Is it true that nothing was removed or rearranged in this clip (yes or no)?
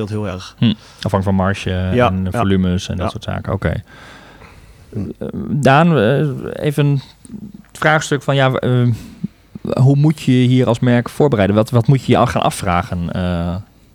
yes